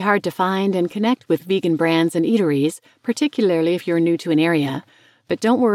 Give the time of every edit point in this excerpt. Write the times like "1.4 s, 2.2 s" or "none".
none